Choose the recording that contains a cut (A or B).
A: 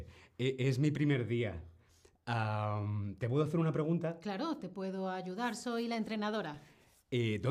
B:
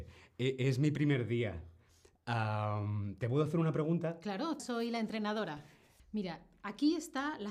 B